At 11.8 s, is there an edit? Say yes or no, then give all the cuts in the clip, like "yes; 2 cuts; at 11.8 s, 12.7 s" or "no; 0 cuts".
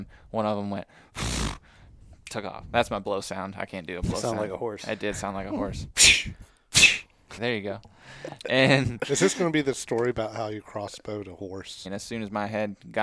yes; 2 cuts; at 7.4 s, 11.8 s